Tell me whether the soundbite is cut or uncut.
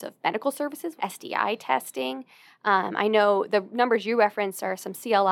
cut